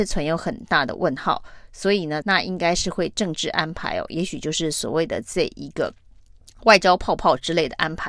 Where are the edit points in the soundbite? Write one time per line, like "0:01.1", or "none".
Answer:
0:02.2